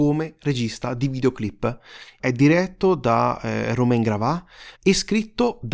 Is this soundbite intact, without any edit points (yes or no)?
no